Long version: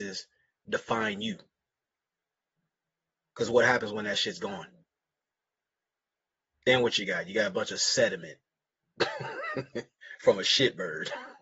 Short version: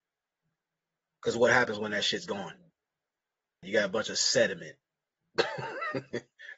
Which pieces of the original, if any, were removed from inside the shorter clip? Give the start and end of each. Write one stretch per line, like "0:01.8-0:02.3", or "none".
0:05.8-0:07.2